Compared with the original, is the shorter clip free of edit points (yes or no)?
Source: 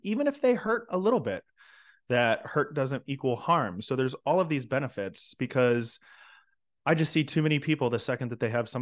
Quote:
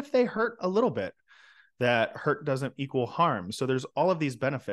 yes